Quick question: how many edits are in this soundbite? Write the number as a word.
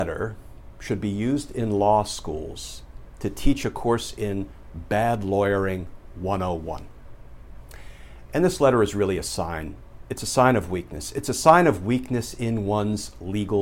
zero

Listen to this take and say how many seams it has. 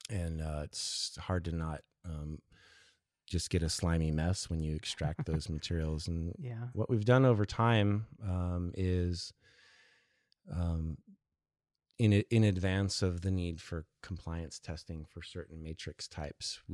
zero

